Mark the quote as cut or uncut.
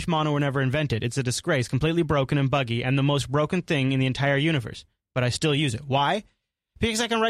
uncut